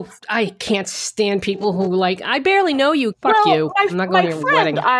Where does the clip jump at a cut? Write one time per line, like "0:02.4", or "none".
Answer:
0:03.1

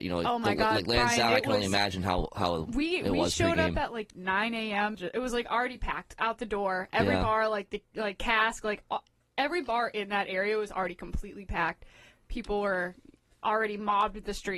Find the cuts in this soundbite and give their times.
0:04.9

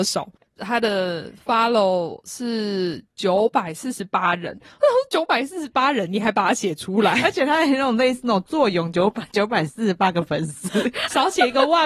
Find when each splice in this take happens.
none

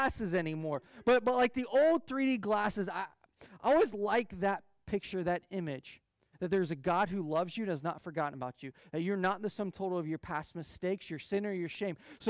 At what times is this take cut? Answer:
0:06.3

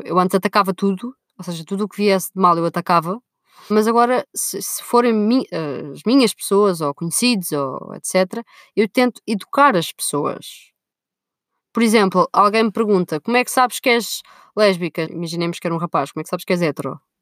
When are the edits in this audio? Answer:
0:03.7
0:15.1

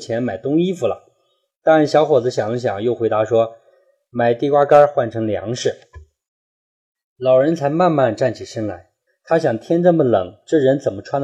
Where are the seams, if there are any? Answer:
0:06.2
0:09.1

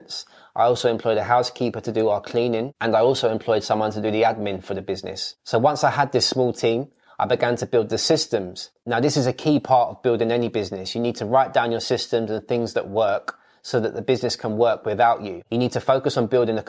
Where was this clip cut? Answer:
0:08.8

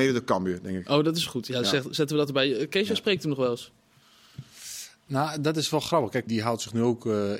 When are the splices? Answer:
0:06.3

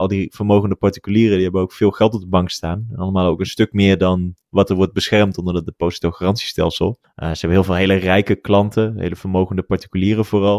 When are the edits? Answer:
0:07.0

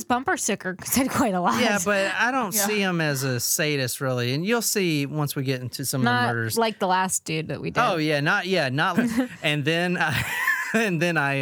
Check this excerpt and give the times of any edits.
0:08.9

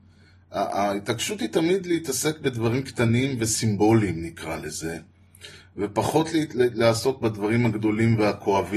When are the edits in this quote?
none

